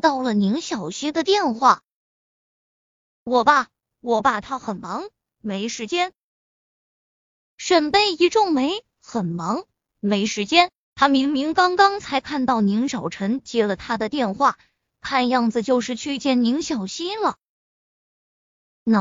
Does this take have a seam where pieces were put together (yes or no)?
no